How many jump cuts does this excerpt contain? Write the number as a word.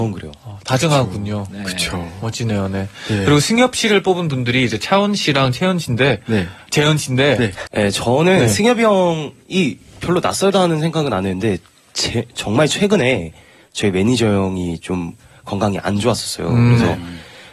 one